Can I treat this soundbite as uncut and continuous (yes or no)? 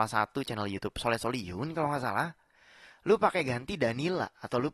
yes